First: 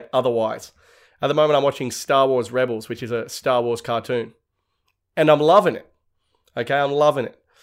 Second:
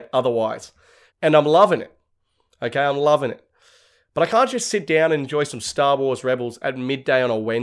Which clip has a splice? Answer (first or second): second